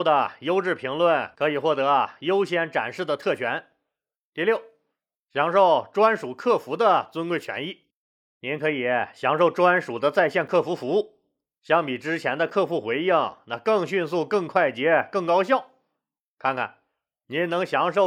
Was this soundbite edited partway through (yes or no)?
no